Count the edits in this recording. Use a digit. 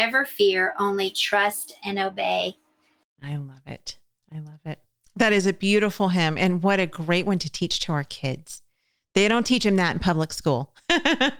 0